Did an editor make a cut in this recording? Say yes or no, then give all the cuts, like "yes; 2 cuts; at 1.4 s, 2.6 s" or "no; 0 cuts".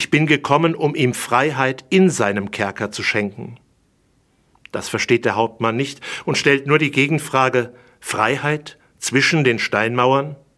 no; 0 cuts